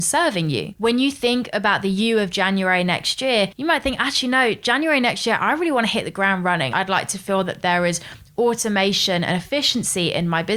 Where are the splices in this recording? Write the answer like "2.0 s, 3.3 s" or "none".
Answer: 6.7 s